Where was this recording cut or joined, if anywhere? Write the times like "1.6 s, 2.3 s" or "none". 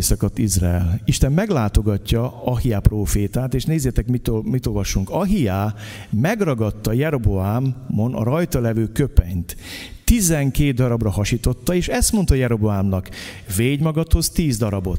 none